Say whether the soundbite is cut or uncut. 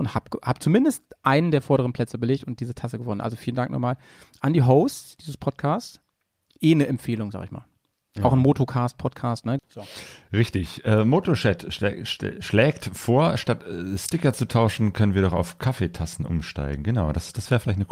cut